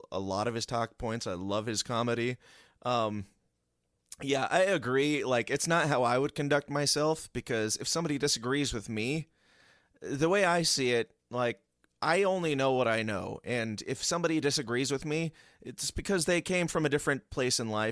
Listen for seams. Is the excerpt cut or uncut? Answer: uncut